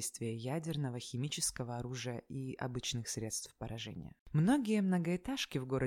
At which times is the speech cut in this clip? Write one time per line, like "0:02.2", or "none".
0:04.2